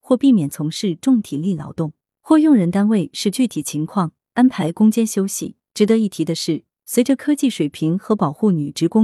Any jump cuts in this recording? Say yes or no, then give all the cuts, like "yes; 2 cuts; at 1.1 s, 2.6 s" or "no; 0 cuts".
yes; 1 cut; at 5.7 s